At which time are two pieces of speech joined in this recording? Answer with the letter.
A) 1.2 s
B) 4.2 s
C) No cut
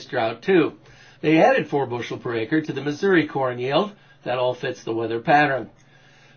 A